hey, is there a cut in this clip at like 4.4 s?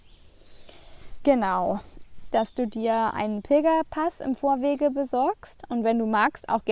no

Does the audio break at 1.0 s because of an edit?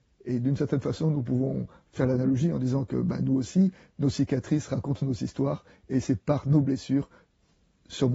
no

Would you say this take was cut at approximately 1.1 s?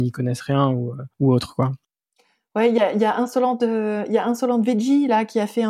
yes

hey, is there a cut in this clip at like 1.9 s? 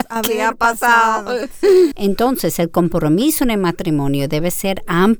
yes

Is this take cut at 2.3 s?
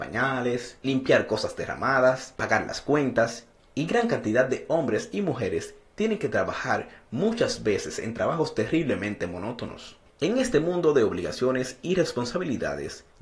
no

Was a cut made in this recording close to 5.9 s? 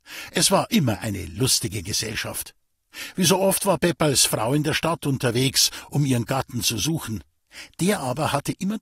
no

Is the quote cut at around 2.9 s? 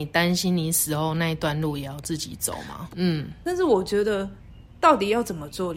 yes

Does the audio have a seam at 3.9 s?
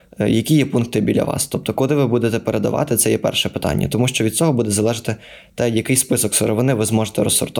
no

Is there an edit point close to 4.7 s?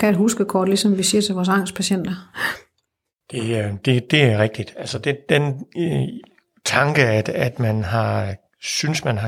no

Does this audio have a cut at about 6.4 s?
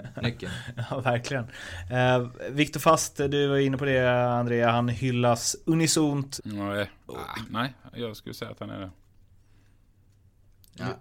yes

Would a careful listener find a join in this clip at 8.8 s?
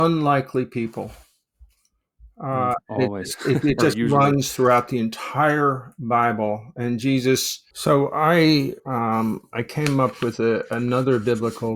yes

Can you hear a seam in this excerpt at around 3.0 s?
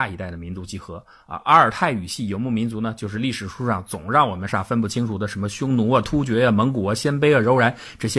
no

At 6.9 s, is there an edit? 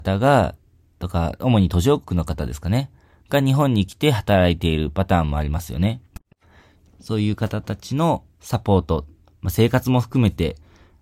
yes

